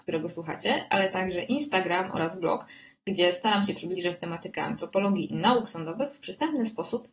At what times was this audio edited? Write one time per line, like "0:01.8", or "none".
none